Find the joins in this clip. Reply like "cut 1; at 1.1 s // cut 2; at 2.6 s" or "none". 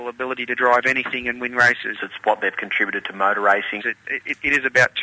cut 1; at 2.0 s // cut 2; at 3.8 s